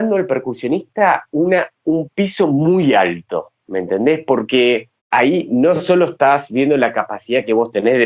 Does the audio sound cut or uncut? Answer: cut